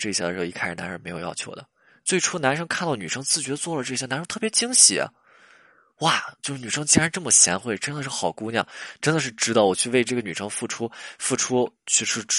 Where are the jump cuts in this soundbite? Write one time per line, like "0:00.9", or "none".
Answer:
none